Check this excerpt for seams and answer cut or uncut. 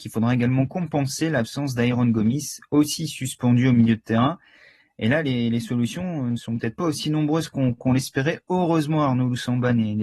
uncut